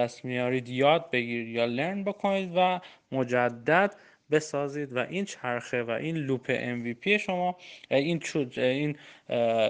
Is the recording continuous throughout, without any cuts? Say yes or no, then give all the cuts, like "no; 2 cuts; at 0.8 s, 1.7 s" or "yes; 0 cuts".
yes; 0 cuts